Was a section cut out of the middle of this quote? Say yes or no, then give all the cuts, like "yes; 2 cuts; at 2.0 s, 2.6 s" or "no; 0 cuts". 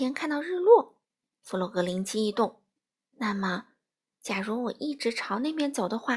no; 0 cuts